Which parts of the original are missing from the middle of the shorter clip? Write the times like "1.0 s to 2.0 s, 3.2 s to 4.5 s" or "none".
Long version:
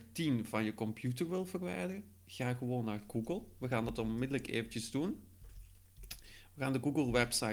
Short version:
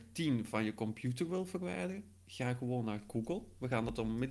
none